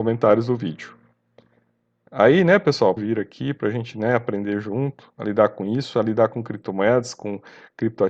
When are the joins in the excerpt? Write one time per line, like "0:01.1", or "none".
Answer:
0:03.0